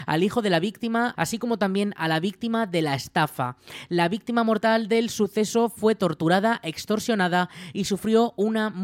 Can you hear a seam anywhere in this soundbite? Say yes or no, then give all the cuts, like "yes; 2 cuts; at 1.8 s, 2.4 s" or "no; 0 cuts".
yes; 1 cut; at 1.2 s